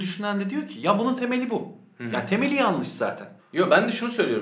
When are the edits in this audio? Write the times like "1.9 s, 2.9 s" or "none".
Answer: 3.4 s